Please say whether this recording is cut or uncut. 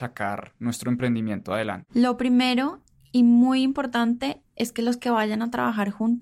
uncut